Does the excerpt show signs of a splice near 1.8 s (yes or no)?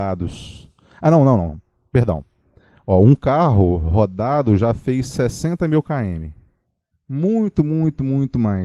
no